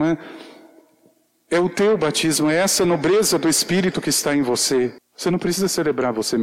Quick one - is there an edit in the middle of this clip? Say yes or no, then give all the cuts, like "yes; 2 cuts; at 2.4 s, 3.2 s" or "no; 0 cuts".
yes; 1 cut; at 5.0 s